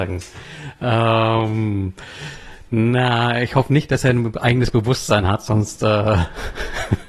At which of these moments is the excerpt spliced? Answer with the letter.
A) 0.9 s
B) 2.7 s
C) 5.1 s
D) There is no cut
D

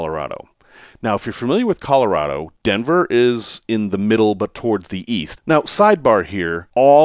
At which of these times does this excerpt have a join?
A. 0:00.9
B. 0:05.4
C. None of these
B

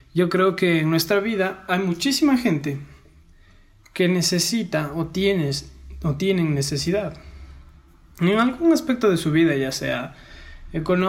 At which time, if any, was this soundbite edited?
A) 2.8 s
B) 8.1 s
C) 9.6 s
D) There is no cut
D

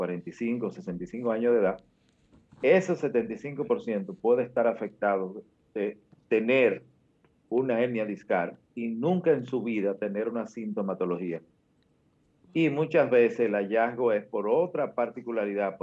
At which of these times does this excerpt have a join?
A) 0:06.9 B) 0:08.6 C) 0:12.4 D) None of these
B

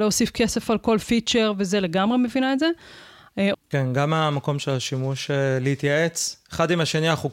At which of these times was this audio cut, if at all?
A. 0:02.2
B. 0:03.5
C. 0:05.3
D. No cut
B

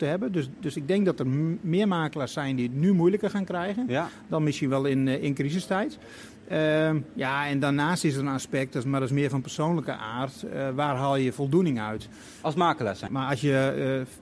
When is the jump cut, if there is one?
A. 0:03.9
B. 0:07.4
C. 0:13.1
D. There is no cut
C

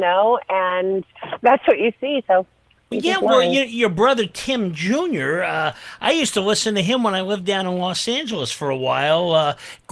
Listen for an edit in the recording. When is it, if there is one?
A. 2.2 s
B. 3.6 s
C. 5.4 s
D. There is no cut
A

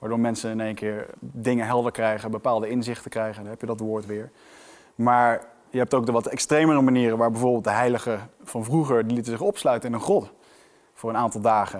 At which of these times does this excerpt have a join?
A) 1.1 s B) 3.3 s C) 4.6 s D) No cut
A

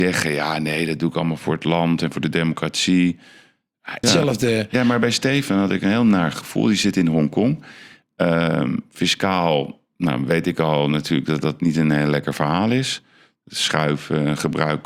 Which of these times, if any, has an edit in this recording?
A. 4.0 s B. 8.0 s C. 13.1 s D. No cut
A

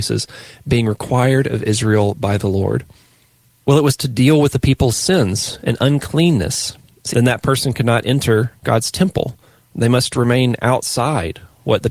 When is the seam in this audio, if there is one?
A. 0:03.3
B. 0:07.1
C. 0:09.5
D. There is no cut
B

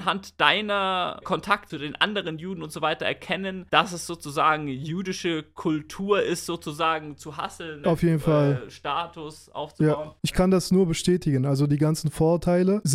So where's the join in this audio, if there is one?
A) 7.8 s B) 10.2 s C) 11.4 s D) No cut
A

